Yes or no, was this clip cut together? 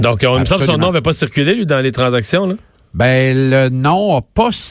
no